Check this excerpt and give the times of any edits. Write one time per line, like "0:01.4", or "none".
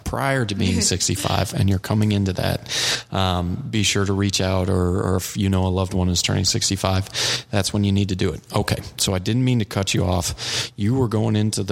none